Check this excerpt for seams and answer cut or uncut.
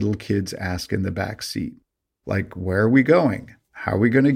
uncut